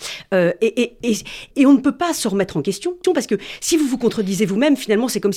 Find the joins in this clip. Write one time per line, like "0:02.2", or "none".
0:01.5
0:03.0